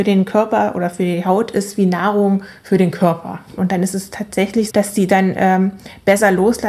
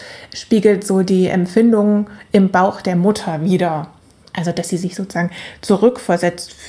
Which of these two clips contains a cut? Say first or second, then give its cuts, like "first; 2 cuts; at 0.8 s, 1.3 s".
first; 2 cuts; at 3.6 s, 4.7 s